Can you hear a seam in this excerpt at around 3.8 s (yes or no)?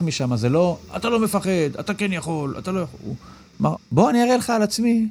yes